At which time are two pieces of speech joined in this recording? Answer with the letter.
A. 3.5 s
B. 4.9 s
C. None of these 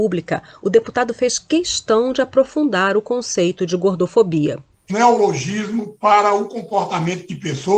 B